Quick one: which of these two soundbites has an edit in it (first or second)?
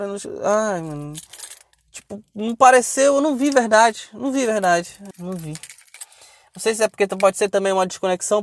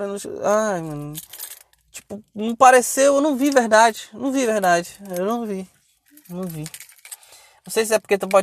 first